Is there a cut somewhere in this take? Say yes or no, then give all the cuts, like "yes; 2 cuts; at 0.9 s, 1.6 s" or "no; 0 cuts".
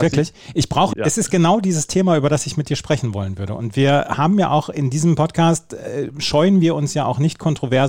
yes; 1 cut; at 0.9 s